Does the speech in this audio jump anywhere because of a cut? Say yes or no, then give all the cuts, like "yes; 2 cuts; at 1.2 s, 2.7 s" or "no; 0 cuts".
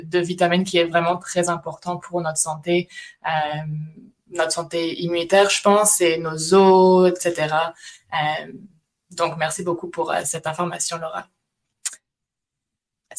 no; 0 cuts